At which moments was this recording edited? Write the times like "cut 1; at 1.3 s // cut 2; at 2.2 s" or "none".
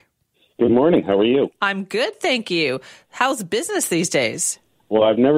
none